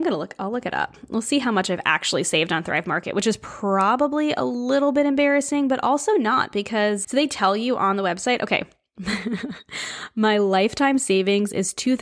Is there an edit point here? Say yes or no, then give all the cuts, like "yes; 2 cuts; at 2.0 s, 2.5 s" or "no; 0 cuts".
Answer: yes; 1 cut; at 7.0 s